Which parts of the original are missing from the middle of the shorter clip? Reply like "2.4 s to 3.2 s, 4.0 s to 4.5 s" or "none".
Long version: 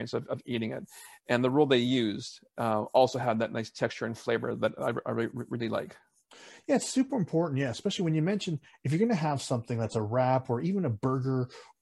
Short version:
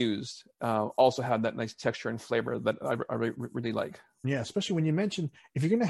6.2 s to 7.5 s